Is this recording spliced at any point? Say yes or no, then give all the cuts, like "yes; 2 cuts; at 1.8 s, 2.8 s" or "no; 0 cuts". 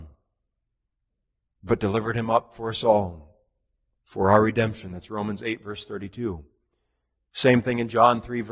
no; 0 cuts